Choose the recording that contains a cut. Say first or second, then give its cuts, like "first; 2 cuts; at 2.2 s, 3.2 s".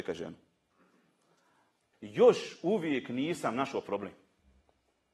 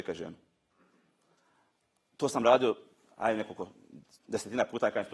first; 1 cut; at 1.9 s